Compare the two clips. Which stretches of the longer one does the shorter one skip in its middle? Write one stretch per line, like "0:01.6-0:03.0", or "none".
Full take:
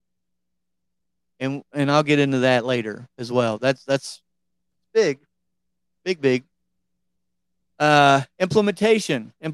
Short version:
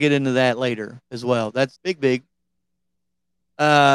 0:03.8-0:06.0

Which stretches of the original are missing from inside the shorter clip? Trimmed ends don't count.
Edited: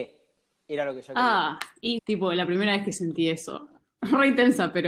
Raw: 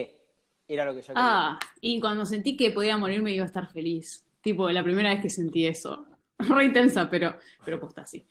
0:02.0-0:04.4

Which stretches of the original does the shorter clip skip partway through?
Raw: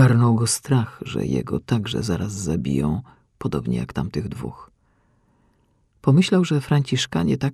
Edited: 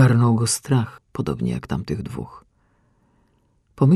0:01.0-0:03.2

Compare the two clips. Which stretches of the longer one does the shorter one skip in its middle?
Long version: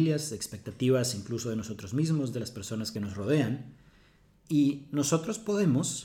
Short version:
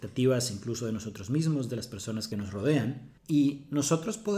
0:03.8-0:04.4

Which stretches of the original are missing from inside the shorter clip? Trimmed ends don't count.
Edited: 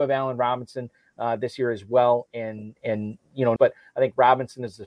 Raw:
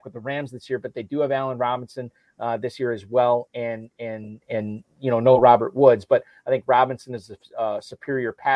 0:03.5-0:03.9
0:05.2-0:06.1

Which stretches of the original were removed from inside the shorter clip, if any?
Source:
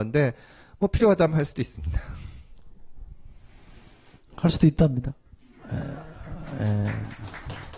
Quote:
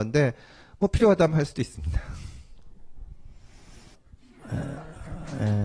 0:03.9-0:05.1

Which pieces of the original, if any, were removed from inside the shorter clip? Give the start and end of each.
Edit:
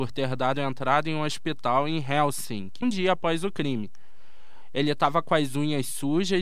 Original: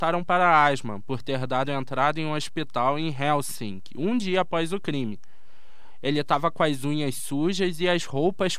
0:03.9-0:04.1

